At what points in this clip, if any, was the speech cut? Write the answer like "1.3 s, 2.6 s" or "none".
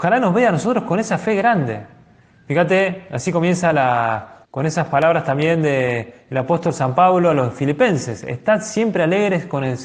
4.5 s

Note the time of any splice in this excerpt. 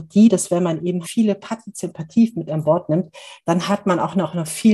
1.0 s

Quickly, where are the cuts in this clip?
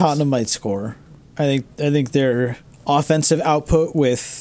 none

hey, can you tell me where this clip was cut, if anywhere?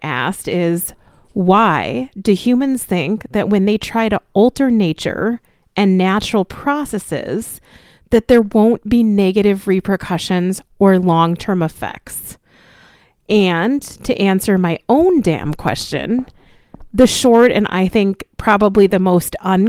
none

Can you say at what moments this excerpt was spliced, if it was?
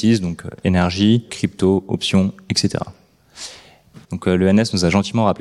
1.3 s, 4.0 s

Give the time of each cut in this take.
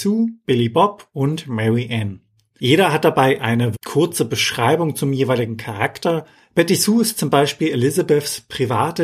3.7 s

